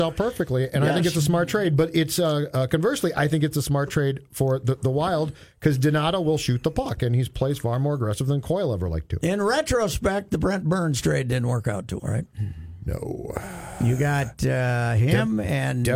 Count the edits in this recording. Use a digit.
1